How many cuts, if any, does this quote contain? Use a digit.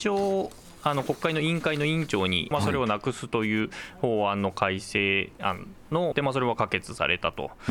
2